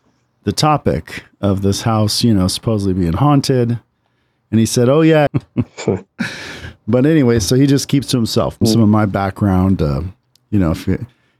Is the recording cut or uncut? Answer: cut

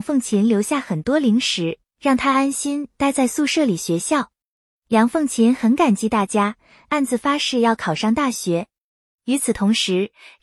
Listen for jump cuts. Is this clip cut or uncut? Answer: uncut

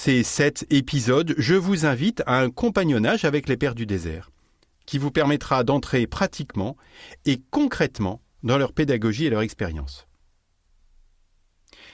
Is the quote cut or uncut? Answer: uncut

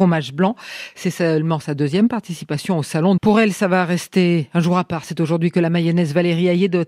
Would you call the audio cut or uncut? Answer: cut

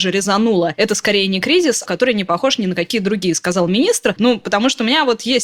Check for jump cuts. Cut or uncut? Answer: cut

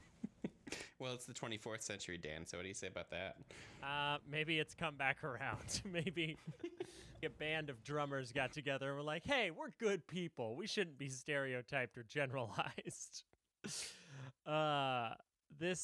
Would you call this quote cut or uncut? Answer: cut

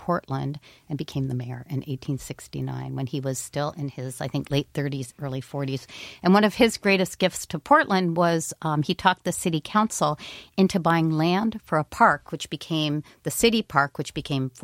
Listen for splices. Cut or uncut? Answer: uncut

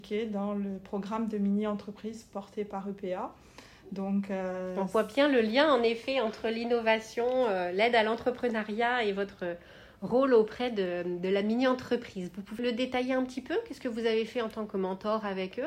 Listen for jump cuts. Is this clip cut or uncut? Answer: cut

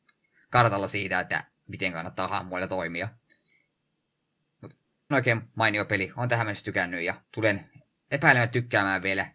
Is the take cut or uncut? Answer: cut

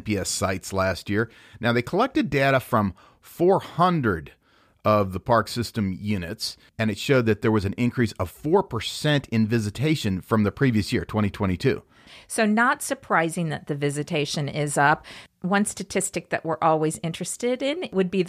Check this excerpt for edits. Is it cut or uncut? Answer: uncut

